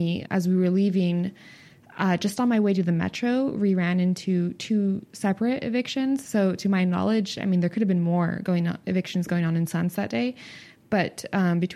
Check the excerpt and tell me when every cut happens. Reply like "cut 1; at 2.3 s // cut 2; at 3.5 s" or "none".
none